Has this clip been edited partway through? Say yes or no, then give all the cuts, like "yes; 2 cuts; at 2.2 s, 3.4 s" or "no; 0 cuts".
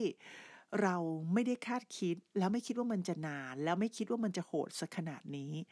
no; 0 cuts